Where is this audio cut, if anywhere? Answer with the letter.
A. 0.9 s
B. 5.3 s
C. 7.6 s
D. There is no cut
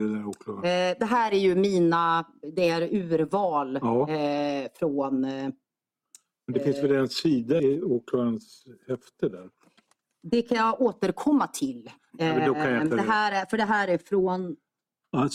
C